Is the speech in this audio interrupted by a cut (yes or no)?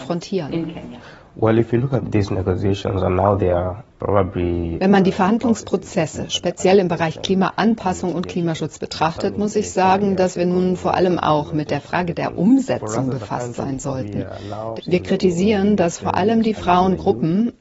yes